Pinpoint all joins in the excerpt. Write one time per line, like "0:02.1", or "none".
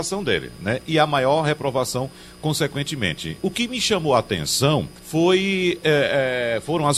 0:03.4
0:05.0